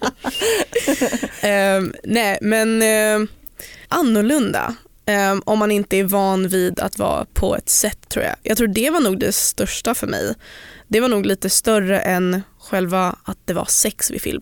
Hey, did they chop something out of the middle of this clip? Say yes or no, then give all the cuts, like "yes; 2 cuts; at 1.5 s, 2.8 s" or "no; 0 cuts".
yes; 2 cuts; at 3.8 s, 8.0 s